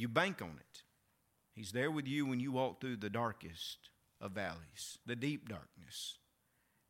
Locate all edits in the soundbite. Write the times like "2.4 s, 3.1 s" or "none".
1.4 s, 5.0 s